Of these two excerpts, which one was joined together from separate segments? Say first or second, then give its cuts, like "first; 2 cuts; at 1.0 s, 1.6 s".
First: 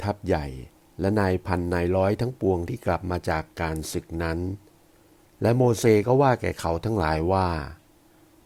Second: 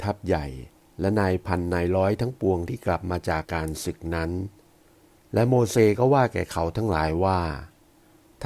second; 1 cut; at 3.4 s